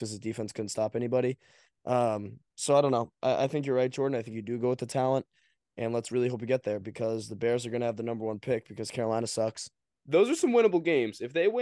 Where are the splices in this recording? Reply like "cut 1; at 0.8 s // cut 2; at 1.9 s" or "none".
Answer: cut 1; at 9.9 s